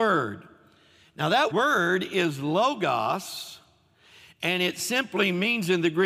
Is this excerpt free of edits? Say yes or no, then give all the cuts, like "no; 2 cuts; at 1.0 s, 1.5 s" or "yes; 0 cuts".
no; 1 cut; at 1.5 s